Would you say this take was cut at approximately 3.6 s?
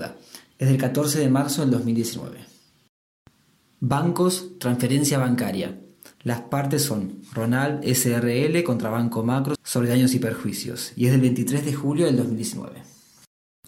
no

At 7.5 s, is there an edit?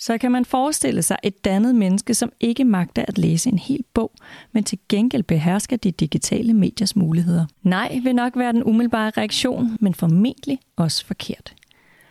yes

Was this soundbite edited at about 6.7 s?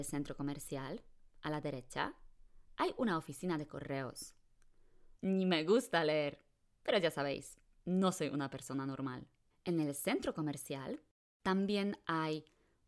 no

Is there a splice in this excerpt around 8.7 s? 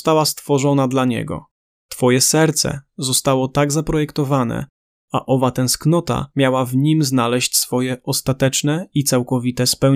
no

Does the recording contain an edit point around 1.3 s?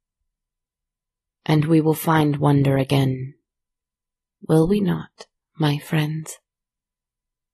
yes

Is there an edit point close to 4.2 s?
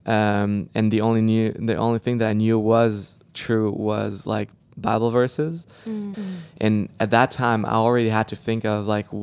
no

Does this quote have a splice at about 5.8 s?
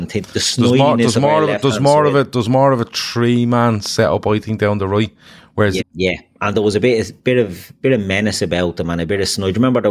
yes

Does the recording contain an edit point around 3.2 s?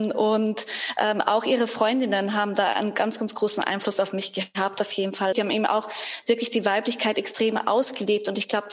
no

